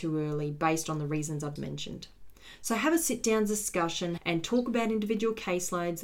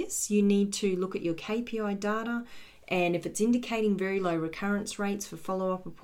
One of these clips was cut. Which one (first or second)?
first